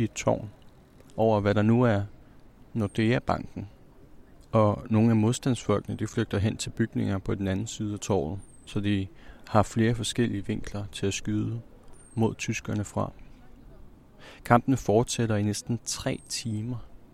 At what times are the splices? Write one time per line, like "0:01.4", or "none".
0:04.3